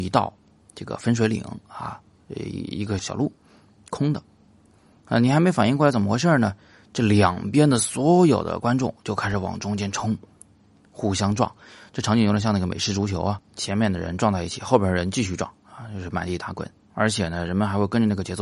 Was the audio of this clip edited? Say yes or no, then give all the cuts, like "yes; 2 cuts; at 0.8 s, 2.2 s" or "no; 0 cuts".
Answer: yes; 1 cut; at 3.0 s